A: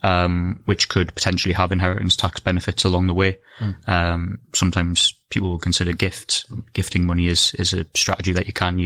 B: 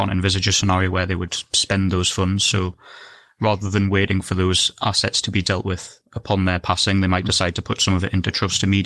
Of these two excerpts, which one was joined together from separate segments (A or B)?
A